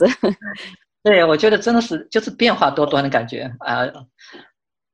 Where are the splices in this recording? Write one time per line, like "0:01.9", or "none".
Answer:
0:03.9